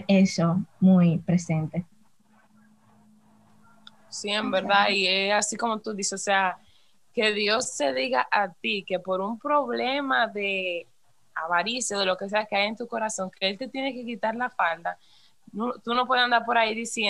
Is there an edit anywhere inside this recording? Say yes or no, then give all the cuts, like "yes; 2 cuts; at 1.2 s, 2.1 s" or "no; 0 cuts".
no; 0 cuts